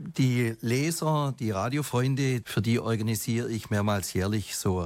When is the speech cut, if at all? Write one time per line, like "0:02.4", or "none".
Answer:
0:02.4